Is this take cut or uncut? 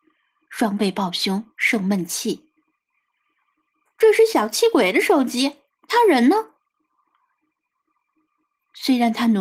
uncut